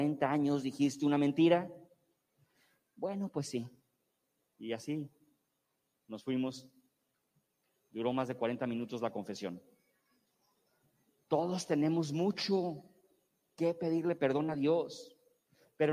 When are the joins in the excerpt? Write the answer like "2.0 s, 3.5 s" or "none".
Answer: none